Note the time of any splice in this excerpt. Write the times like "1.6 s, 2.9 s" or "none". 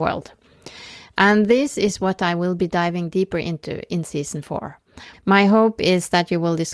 5.1 s